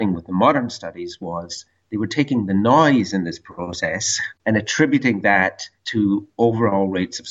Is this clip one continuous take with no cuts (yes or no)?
no